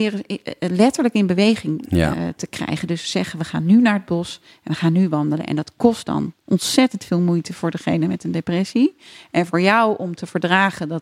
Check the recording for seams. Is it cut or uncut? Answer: uncut